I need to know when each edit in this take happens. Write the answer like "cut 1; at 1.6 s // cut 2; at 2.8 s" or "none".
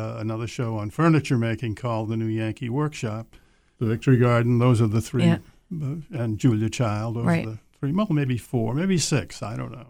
cut 1; at 3.8 s